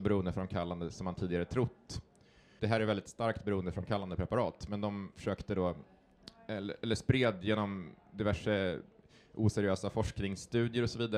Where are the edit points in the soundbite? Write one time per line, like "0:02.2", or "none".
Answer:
0:02.6